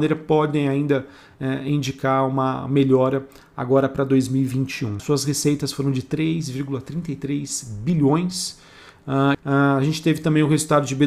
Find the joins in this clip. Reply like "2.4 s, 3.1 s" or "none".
5.0 s, 9.3 s